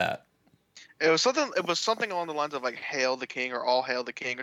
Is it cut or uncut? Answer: uncut